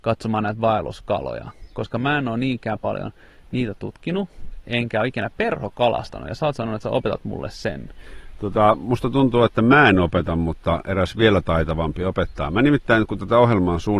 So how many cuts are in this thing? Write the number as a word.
zero